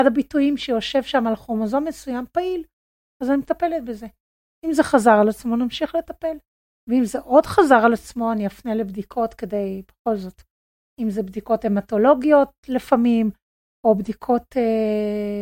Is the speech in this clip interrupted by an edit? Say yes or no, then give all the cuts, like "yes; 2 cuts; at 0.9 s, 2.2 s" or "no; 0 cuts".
no; 0 cuts